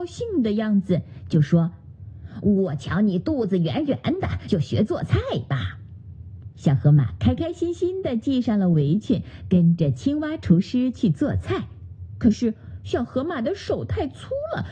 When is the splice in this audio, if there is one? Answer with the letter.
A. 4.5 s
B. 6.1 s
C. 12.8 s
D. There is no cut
A